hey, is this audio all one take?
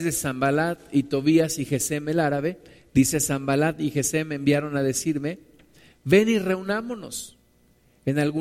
yes; 0 cuts

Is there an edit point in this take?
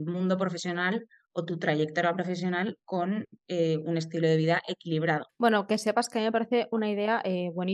yes; 1 cut; at 5.3 s

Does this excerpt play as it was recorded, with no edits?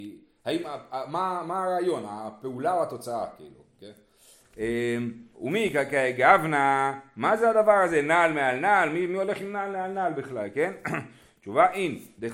no; 1 cut; at 5.3 s

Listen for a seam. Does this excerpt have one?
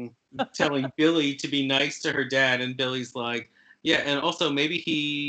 no; 0 cuts

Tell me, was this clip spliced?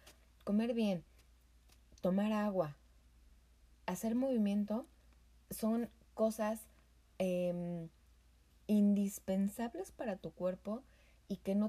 no; 0 cuts

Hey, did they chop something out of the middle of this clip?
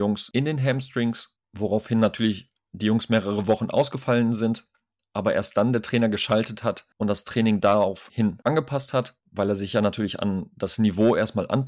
yes; 1 cut; at 9.2 s

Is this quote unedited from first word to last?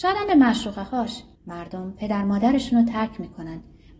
no; 1 cut; at 1.4 s

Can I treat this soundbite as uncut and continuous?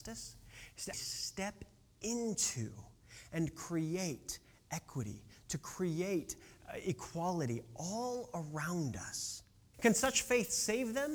no; 2 cuts; at 0.9 s, 9.7 s

